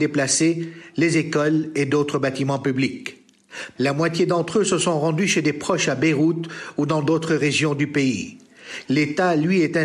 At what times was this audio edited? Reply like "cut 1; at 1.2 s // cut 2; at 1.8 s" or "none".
cut 1; at 3.8 s // cut 2; at 8.9 s